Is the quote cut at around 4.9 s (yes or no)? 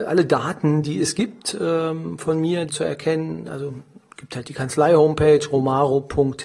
no